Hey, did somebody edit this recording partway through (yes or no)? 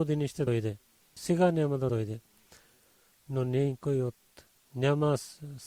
yes